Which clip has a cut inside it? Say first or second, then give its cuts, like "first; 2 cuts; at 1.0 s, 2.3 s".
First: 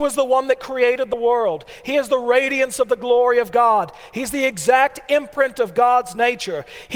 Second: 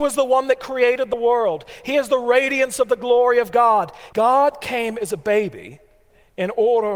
second; 1 cut; at 4.1 s